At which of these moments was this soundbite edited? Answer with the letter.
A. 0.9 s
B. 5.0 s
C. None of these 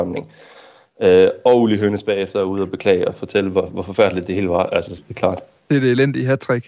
B